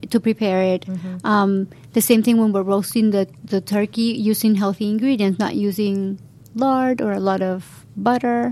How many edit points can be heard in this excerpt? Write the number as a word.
zero